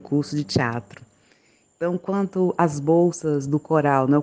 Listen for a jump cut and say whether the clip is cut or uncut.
uncut